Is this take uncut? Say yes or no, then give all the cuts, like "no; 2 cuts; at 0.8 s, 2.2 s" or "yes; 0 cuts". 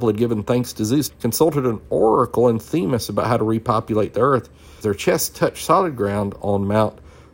no; 2 cuts; at 1.1 s, 4.8 s